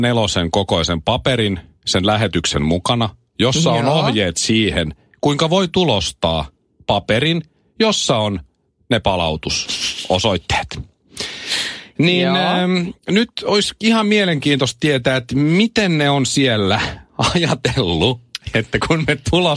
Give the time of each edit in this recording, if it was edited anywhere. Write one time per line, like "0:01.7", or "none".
0:13.0